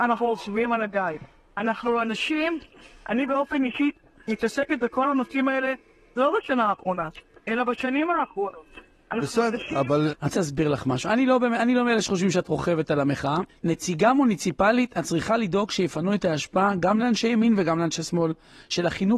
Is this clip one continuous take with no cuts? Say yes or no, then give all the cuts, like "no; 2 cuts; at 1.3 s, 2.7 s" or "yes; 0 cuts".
no; 2 cuts; at 10.1 s, 13.5 s